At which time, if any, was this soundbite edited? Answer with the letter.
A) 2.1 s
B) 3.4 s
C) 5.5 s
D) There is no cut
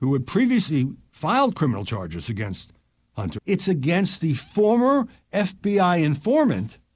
B